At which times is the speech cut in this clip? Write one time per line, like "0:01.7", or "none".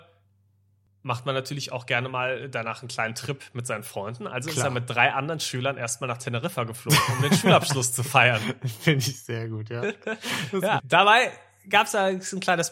0:10.8